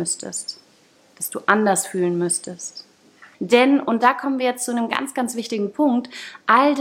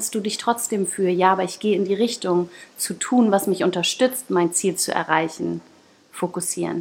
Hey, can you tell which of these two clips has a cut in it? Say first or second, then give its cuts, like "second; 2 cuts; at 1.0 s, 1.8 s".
first; 1 cut; at 3.3 s